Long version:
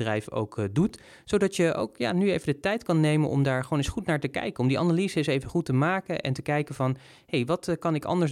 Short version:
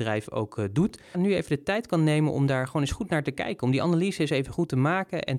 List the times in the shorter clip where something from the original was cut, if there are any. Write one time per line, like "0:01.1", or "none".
0:01.1